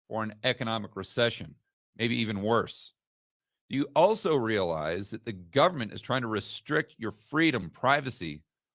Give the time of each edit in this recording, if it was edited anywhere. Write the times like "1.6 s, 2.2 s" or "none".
7.6 s